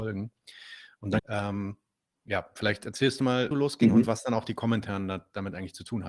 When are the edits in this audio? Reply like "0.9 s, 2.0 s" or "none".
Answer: 1.2 s, 3.5 s